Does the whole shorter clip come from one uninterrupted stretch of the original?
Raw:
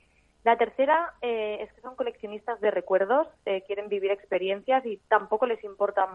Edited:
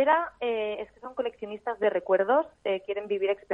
yes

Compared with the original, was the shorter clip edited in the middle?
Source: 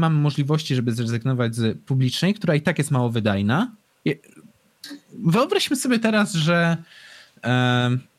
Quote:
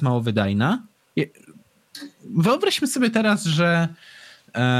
no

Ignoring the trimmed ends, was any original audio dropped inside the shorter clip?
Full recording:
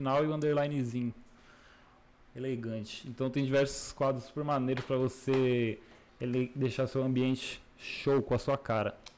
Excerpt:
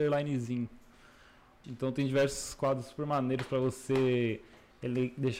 yes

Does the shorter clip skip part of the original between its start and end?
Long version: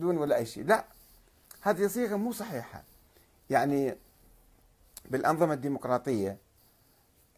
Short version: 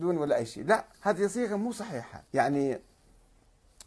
yes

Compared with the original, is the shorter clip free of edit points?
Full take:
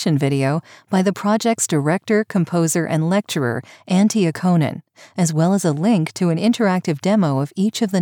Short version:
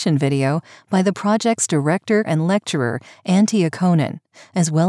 no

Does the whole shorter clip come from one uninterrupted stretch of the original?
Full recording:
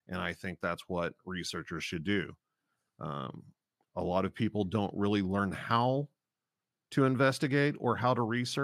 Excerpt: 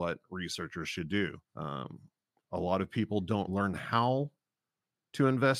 no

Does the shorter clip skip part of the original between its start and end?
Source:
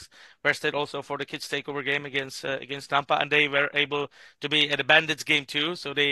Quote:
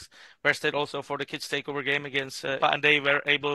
yes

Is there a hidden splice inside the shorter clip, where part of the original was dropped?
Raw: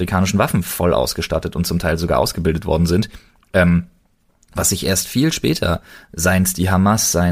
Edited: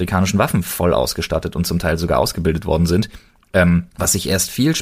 yes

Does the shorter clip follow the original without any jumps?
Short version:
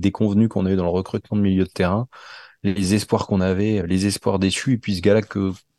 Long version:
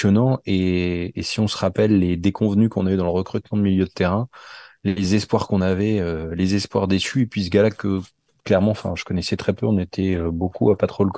no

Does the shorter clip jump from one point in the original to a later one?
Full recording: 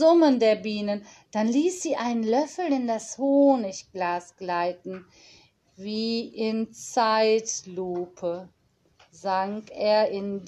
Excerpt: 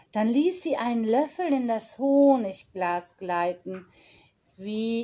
no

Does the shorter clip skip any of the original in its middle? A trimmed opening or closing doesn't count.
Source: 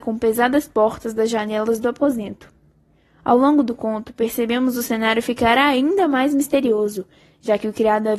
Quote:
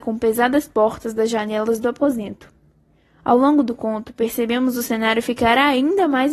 no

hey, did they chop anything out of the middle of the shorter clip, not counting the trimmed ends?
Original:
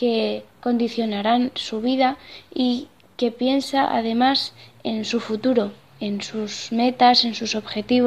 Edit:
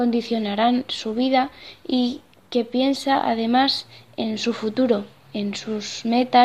no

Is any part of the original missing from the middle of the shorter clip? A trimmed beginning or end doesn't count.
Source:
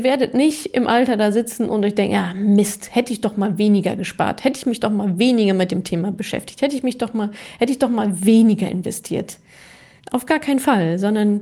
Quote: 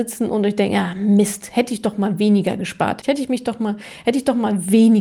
yes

